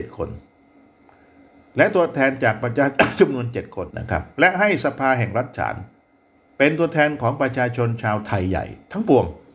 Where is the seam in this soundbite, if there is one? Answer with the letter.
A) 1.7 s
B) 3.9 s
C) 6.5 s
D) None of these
B